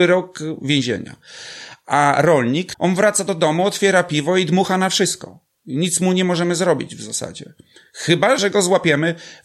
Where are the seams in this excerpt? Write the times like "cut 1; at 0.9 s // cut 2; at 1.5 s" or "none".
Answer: cut 1; at 2.7 s // cut 2; at 8.4 s